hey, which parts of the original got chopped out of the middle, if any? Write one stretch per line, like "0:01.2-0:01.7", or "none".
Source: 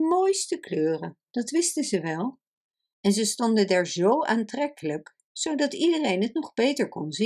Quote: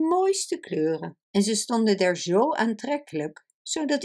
0:01.2-0:02.9